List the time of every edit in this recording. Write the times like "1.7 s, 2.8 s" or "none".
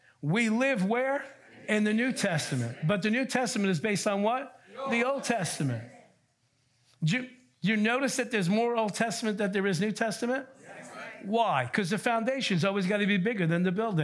none